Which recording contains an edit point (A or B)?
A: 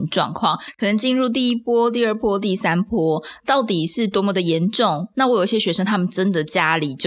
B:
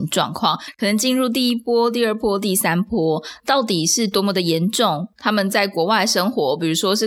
A